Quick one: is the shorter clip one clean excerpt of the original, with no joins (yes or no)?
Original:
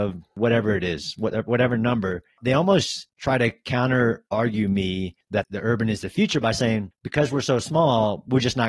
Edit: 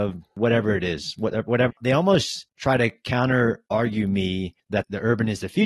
no